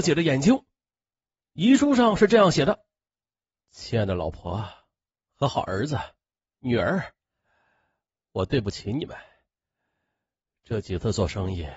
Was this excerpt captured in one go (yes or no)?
no